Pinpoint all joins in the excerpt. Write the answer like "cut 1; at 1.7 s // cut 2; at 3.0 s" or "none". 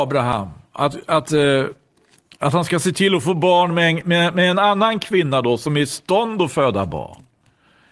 cut 1; at 1.3 s